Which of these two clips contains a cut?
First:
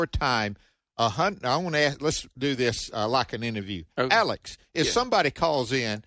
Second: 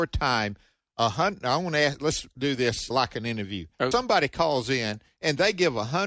second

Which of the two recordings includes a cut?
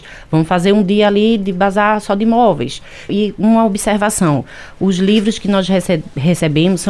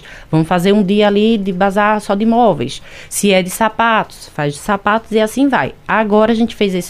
first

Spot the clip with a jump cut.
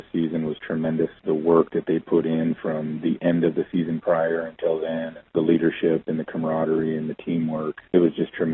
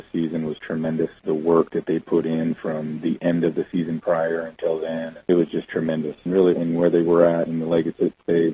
second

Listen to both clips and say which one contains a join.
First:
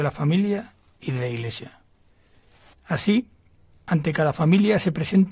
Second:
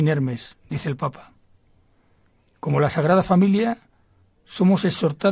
first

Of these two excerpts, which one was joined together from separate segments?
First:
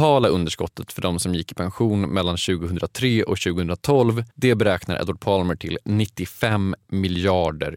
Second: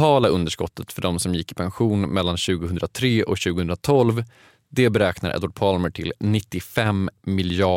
first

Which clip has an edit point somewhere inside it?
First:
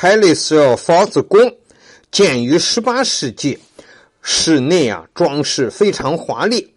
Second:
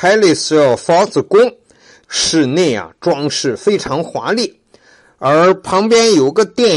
second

